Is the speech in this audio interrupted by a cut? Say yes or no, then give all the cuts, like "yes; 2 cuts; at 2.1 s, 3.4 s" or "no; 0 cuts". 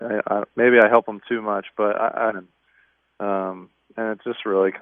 yes; 1 cut; at 2.3 s